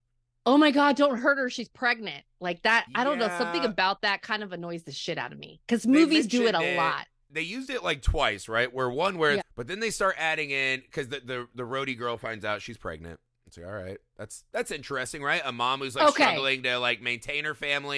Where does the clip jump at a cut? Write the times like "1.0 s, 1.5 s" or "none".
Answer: 9.4 s